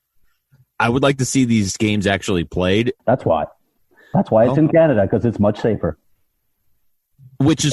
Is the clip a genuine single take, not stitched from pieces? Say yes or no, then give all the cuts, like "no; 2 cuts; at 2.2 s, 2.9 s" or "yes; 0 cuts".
no; 1 cut; at 3.0 s